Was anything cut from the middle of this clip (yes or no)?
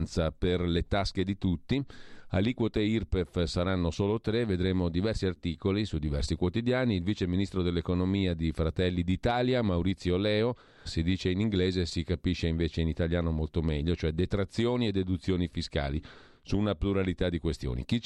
yes